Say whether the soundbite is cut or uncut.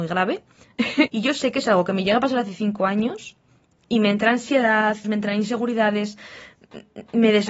cut